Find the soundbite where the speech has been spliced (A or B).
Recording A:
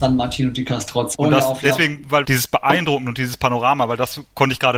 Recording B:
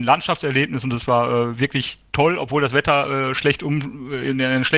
A